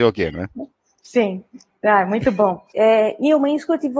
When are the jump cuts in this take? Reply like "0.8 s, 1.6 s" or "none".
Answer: 2.7 s